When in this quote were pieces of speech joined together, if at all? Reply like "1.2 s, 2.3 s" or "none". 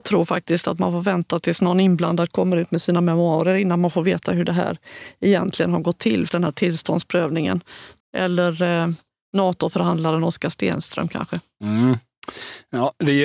6.3 s, 8.0 s